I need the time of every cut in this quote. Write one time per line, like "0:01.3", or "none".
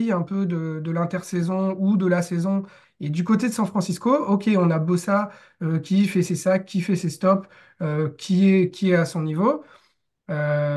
0:02.8